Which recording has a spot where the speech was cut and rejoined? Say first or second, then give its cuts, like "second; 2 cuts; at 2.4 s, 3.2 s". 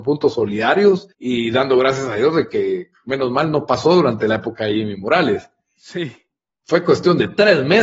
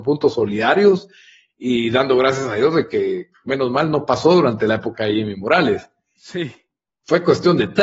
first; 1 cut; at 1.1 s